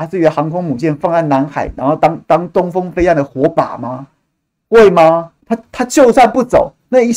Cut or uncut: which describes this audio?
cut